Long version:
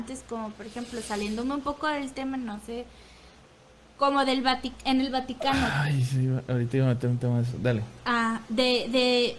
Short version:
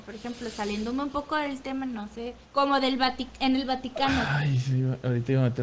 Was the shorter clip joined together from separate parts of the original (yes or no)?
yes